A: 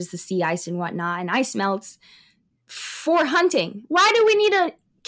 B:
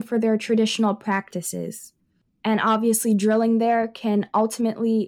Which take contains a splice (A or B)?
A